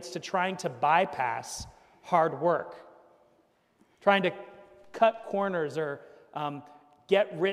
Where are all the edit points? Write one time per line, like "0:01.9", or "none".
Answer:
none